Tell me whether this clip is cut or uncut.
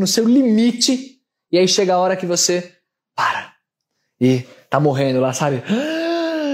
uncut